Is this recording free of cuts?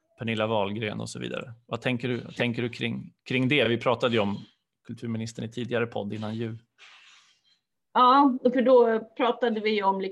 yes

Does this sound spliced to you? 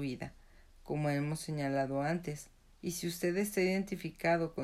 yes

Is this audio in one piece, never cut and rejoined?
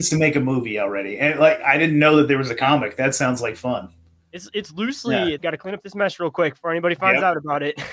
no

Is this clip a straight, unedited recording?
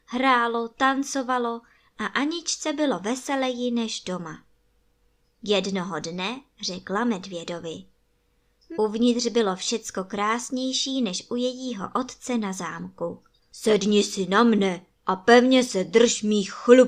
no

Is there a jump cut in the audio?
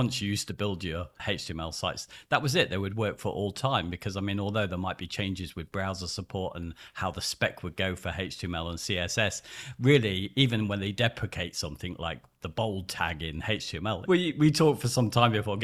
yes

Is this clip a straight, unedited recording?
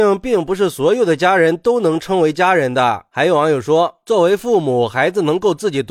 yes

